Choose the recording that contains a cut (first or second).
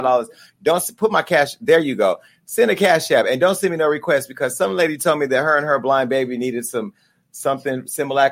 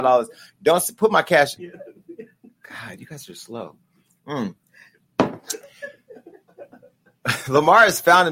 second